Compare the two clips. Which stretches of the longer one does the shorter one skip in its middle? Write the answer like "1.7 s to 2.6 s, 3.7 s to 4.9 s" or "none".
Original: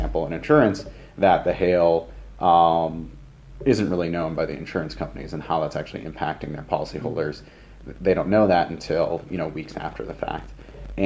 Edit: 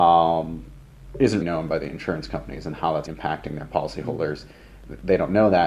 3.9 s to 4.1 s, 5.7 s to 6.0 s